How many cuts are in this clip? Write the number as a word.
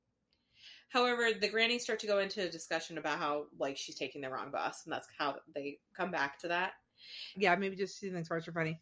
two